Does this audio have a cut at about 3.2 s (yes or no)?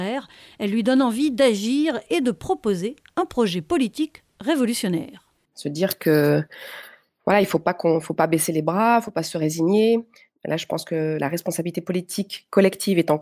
no